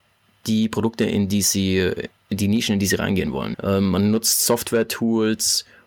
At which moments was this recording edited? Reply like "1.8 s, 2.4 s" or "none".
3.5 s